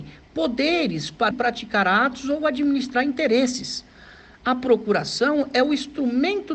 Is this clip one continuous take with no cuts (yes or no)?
no